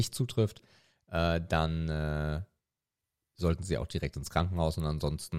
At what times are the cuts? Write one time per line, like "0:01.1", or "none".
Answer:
none